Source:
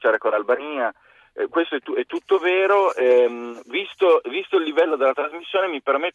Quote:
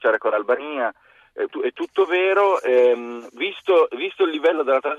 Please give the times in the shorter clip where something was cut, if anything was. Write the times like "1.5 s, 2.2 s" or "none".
1.5 s